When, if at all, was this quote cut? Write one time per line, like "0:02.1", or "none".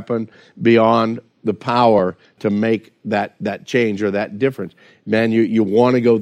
none